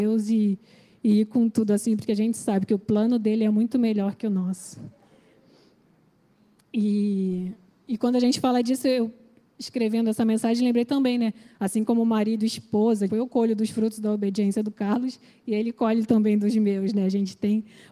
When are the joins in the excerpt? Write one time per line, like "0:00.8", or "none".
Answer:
0:11.5
0:13.1